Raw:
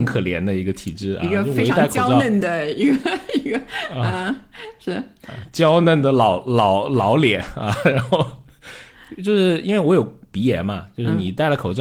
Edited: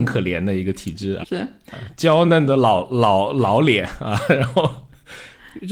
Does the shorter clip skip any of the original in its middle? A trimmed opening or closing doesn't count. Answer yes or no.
yes